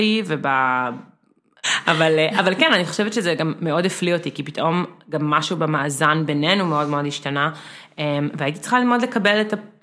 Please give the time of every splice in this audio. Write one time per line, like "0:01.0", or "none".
0:01.6